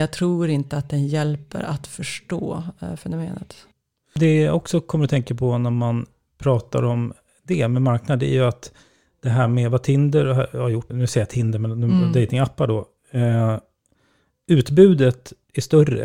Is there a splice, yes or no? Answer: yes